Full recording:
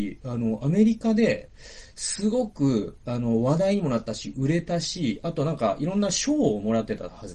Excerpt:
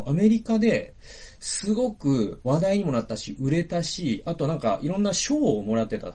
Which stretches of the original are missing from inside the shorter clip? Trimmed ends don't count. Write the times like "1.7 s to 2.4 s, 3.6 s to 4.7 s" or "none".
3.0 s to 3.4 s